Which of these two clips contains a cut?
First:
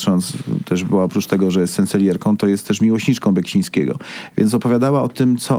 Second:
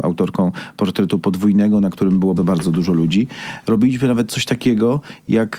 second; 2 cuts; at 2.4 s, 3.6 s

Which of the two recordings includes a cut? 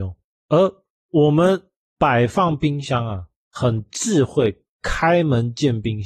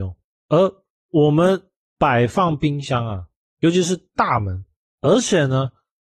second; 1 cut; at 3.4 s

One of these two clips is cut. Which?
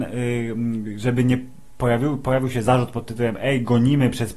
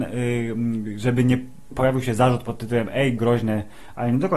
second; 2 cuts; at 1.7 s, 3.2 s

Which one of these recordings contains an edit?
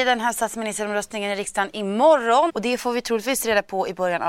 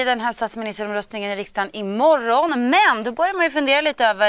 first; 1 cut; at 2.5 s

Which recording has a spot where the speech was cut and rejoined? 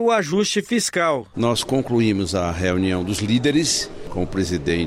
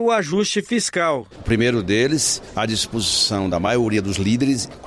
second; 1 cut; at 1.3 s

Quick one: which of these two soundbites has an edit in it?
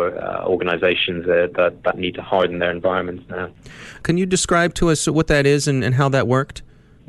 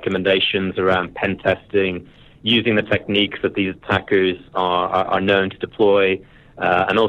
first; 1 cut; at 4.0 s

